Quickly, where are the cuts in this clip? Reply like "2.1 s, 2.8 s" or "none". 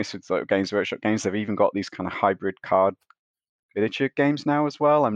none

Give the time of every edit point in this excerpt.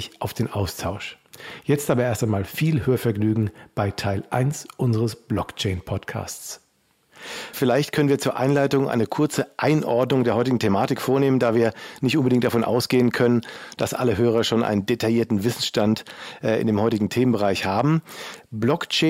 7.5 s

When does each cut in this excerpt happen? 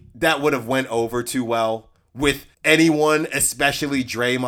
2.5 s

